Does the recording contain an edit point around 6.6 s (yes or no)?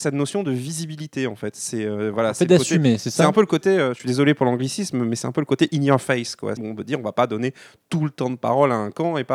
yes